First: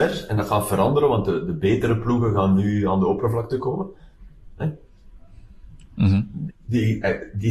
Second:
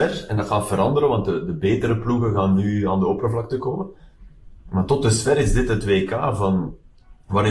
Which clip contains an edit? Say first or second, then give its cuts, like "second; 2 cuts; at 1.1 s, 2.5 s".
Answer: first; 2 cuts; at 4.6 s, 6.5 s